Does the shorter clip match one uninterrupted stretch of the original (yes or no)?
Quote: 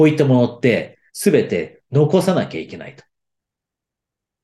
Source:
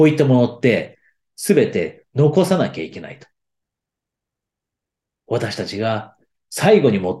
no